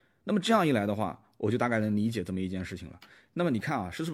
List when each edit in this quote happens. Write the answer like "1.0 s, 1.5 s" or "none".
none